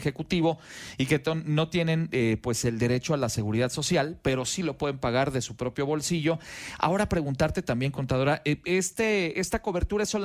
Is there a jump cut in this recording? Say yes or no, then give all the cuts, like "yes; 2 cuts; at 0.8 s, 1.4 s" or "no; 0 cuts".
no; 0 cuts